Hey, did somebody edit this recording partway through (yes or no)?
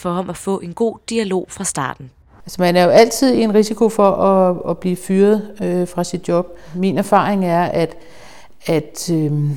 yes